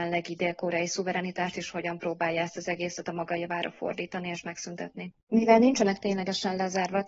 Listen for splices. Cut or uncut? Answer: cut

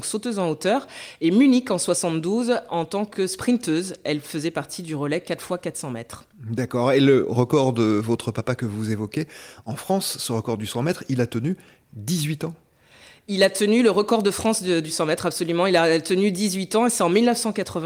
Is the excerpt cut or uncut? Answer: uncut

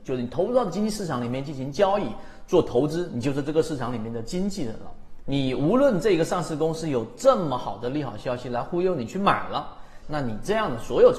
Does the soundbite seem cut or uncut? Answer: cut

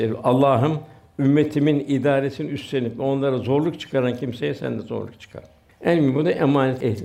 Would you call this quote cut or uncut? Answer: cut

